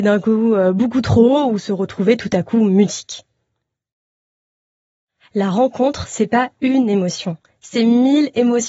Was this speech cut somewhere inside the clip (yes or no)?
no